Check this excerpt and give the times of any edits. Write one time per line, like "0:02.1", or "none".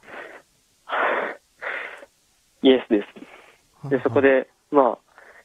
0:03.7